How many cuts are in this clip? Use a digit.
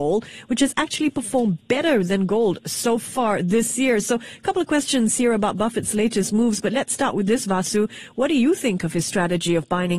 0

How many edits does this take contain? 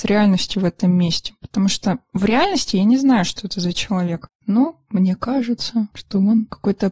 0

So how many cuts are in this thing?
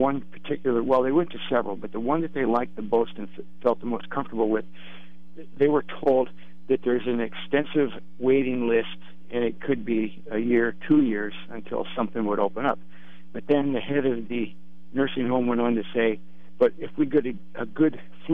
0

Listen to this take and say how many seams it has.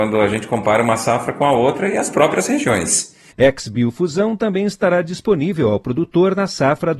1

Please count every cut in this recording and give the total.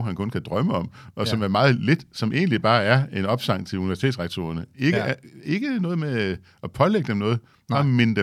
0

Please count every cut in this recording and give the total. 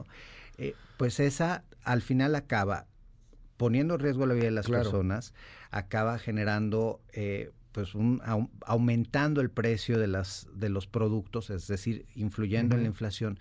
1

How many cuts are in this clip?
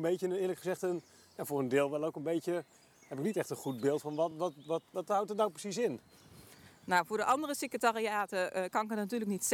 0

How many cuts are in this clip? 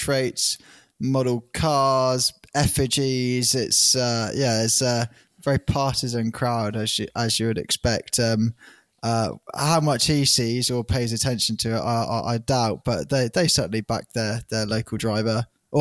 0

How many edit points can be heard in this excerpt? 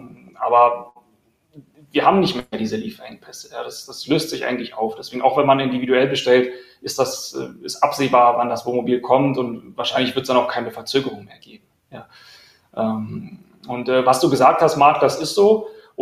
0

